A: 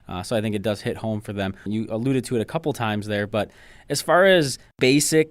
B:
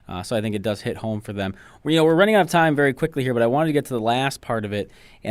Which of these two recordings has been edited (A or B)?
A